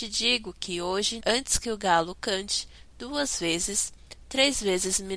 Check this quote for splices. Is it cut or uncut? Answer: cut